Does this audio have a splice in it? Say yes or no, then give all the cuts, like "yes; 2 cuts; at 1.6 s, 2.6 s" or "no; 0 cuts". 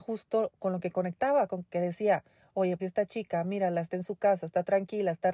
yes; 1 cut; at 2.8 s